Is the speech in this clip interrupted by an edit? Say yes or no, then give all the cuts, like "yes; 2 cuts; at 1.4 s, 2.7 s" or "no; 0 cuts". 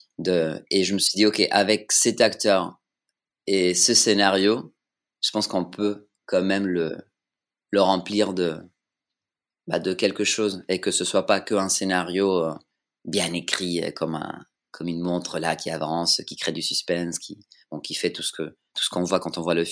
no; 0 cuts